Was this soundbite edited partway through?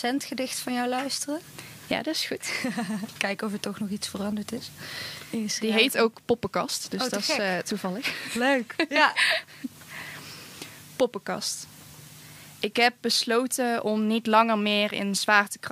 no; 0 cuts

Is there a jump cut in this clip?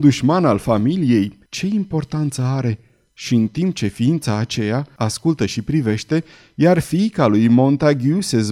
yes; 2 cuts; at 1.5 s, 5.0 s

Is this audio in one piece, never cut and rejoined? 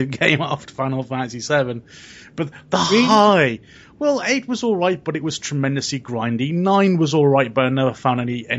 yes; 0 cuts

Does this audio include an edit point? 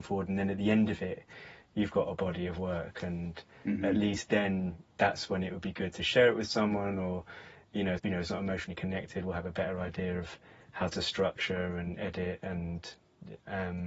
yes; 1 cut; at 8.0 s

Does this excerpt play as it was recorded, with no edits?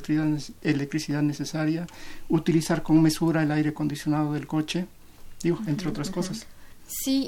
yes; 0 cuts

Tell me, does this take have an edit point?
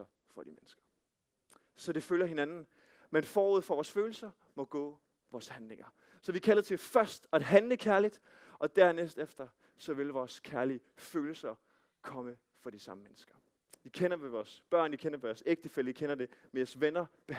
yes; 1 cut; at 13.8 s

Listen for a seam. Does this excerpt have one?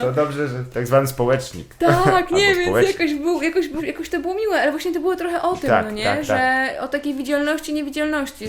yes; 1 cut; at 3.8 s

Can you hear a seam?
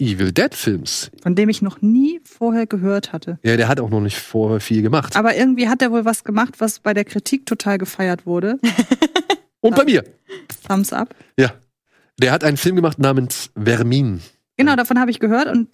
no; 0 cuts

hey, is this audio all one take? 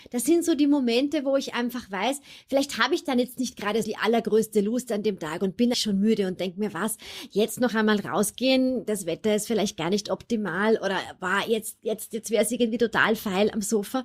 no; 2 cuts; at 3.8 s, 5.7 s

